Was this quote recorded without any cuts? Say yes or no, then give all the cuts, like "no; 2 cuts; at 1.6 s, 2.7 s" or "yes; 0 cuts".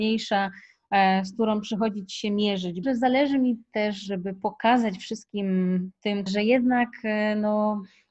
no; 2 cuts; at 2.8 s, 6.3 s